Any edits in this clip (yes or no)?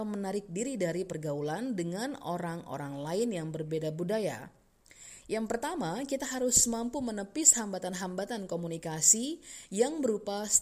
yes